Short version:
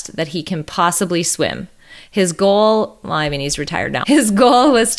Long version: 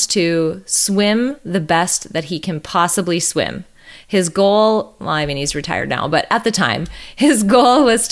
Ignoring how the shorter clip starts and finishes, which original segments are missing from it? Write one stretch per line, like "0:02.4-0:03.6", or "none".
0:06.0-0:07.2